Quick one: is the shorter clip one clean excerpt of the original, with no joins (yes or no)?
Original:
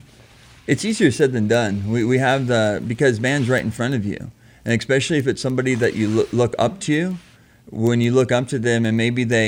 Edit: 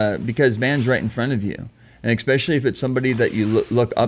yes